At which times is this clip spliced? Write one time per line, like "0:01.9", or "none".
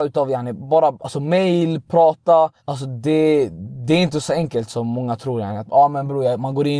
0:02.6